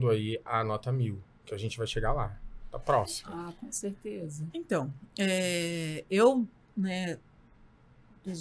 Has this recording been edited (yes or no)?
no